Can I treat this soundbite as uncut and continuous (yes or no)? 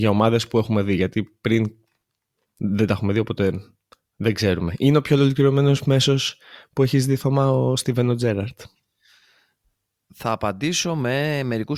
yes